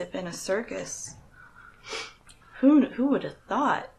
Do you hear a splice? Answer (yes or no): yes